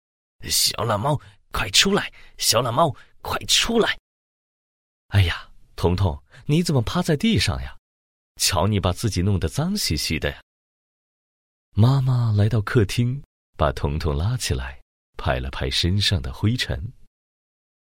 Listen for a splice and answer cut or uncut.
uncut